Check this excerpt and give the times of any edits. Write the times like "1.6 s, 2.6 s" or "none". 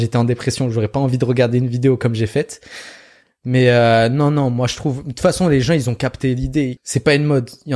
6.8 s